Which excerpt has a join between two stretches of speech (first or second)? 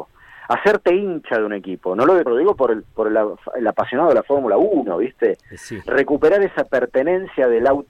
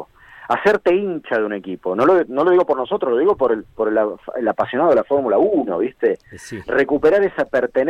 first